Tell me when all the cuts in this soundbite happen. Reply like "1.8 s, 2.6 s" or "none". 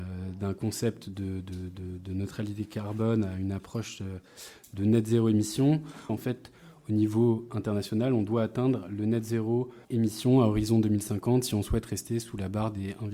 6.1 s, 9.8 s